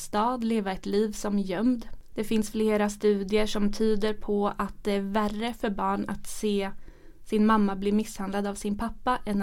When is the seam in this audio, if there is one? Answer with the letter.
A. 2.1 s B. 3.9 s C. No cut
A